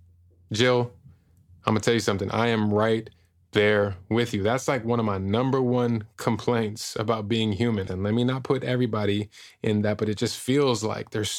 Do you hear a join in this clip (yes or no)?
yes